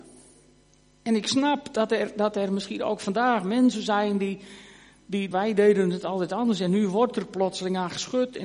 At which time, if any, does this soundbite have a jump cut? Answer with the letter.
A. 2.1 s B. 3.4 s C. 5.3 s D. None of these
C